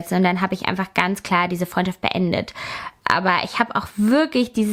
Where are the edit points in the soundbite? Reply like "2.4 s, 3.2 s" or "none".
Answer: none